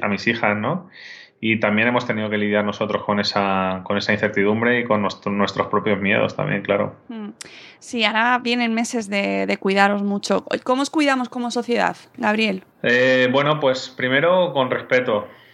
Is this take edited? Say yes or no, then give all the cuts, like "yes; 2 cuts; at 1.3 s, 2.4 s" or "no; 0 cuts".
yes; 1 cut; at 12.7 s